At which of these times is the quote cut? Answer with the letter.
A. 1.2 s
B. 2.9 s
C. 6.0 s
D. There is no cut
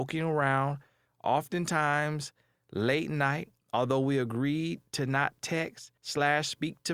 C